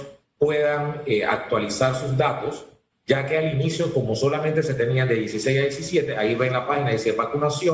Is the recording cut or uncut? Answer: uncut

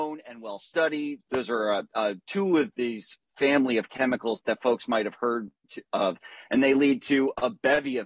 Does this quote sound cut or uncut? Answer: cut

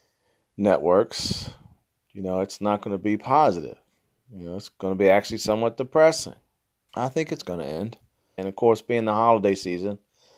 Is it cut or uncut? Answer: cut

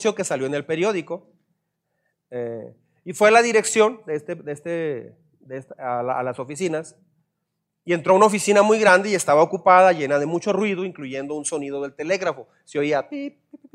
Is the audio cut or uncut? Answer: uncut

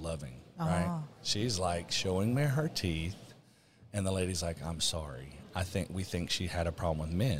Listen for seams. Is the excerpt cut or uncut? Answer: cut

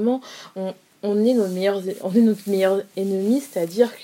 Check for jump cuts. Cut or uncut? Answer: uncut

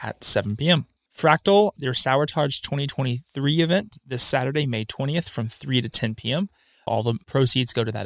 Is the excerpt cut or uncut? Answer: cut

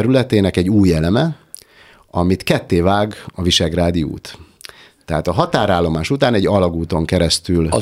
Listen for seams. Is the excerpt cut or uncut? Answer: uncut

